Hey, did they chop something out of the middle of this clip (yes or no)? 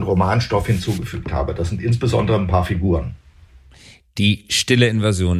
no